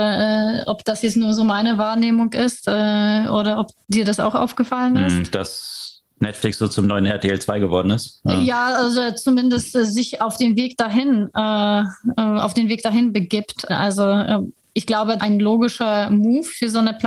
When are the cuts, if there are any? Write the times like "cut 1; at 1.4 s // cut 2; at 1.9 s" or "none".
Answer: cut 1; at 13.7 s // cut 2; at 15.2 s